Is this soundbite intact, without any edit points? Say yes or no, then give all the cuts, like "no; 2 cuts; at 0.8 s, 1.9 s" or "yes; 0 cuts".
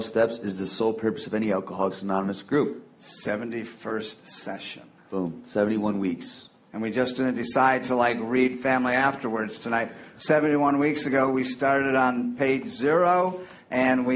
yes; 0 cuts